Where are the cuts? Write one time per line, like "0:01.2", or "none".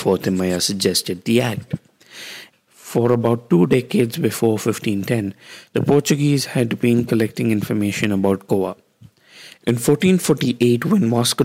0:02.5
0:09.6